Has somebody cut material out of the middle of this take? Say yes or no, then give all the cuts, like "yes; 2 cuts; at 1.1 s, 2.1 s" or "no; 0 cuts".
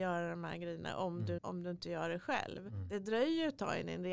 yes; 1 cut; at 1.4 s